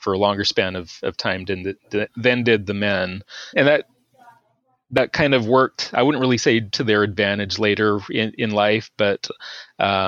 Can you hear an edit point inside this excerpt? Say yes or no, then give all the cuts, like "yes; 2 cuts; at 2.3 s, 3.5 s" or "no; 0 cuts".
yes; 1 cut; at 3.5 s